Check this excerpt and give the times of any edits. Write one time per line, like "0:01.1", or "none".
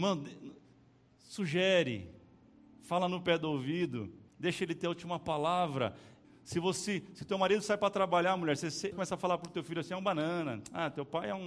0:04.3
0:06.2
0:08.9

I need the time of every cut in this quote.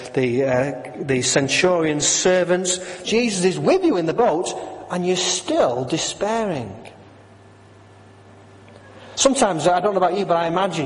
0:03.0

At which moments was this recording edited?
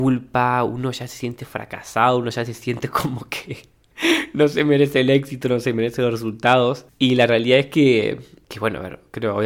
none

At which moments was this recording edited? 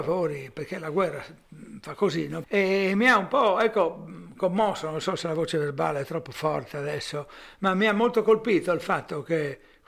0:02.4

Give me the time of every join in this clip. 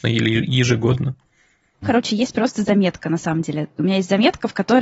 0:01.8

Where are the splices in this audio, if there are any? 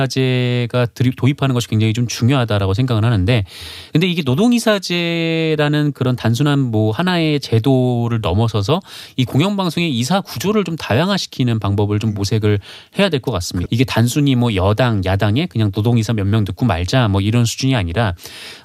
0:13.7

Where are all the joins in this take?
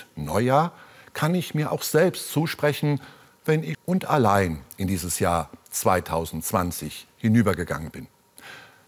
0:03.7

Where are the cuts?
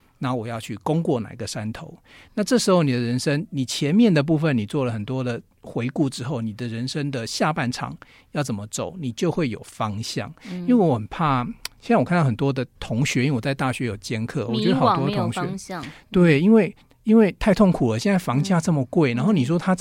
0:12.7

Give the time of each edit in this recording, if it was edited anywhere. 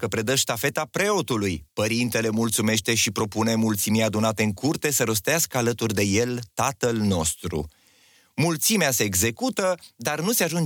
none

